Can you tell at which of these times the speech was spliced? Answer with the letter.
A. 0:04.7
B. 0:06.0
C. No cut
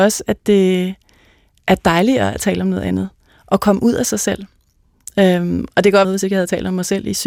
B